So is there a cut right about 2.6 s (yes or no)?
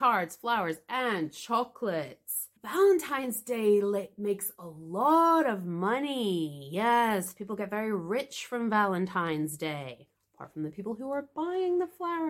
yes